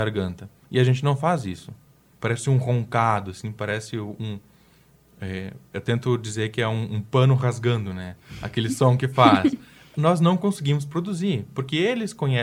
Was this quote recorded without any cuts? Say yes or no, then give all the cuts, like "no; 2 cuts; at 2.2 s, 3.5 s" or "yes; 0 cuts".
no; 1 cut; at 2.2 s